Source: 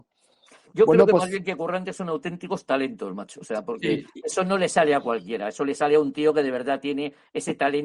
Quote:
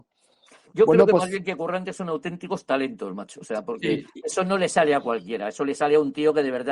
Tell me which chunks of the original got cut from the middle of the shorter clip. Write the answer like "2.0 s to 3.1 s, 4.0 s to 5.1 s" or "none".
none